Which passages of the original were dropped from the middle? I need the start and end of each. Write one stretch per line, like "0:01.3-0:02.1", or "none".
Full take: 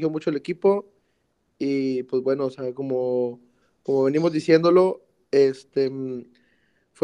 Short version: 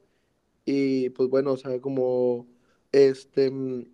0:03.8-0:05.3